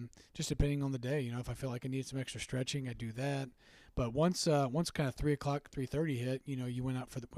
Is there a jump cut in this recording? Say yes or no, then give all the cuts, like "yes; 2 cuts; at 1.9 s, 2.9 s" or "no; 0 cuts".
no; 0 cuts